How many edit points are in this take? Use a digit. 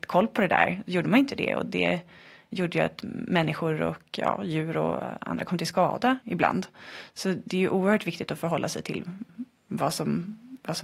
0